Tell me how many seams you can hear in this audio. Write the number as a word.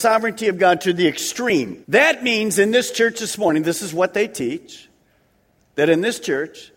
one